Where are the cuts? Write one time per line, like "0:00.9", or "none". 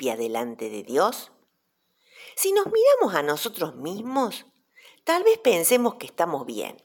none